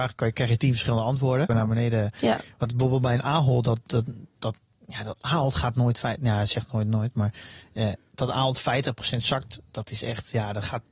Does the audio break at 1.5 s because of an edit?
yes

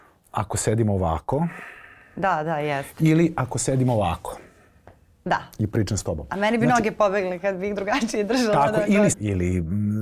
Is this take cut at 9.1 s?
yes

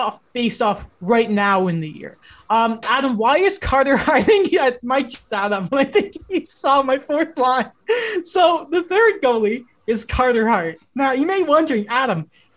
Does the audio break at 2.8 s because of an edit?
yes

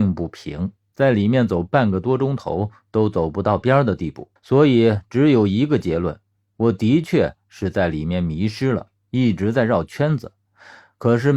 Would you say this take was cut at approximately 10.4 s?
no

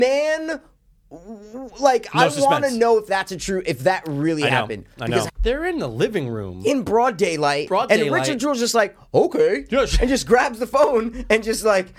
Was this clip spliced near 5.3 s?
yes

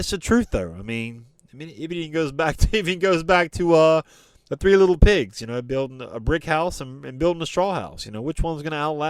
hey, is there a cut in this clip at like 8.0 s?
no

